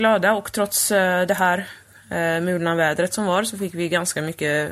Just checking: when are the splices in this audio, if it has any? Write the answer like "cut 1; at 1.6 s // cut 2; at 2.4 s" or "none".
none